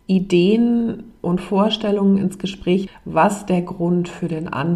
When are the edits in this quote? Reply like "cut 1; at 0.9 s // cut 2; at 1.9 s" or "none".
cut 1; at 2.9 s